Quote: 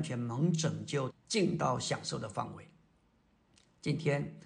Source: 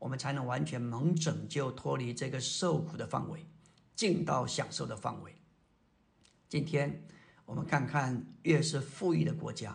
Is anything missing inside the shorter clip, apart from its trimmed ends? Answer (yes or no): yes